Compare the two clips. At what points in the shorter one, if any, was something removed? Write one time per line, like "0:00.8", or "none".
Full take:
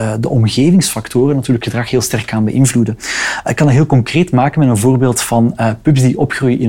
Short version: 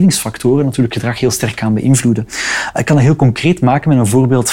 none